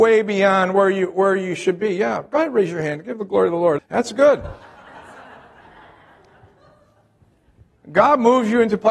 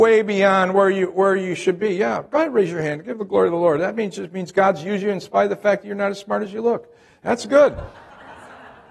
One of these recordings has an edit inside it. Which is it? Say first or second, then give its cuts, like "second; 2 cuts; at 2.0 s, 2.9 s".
first; 1 cut; at 3.8 s